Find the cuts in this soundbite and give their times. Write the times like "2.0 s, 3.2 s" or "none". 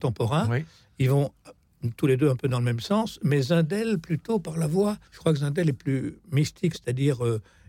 5.0 s, 6.7 s